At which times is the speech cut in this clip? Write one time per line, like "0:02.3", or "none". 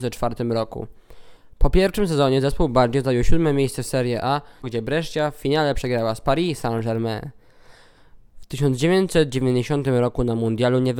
0:04.6
0:08.3